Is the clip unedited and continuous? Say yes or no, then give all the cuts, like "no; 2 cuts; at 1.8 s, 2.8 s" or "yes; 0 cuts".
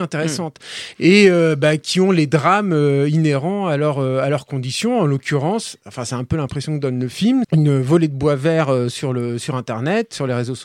no; 2 cuts; at 0.9 s, 7.4 s